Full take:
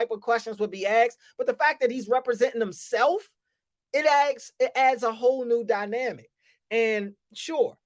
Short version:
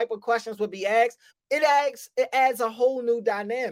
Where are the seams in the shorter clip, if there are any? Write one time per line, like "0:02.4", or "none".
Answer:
0:01.3